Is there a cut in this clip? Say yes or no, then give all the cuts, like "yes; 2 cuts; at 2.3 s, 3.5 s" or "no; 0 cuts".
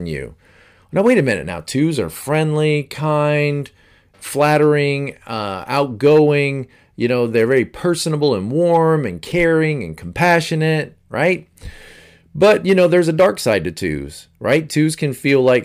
no; 0 cuts